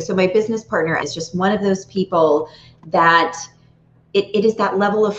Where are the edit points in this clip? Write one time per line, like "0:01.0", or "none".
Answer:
0:01.0